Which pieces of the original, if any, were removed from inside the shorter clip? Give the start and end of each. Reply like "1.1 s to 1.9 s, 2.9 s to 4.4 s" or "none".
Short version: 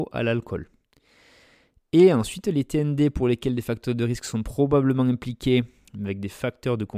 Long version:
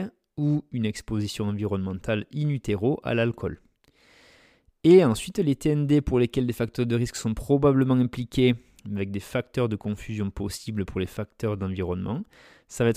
none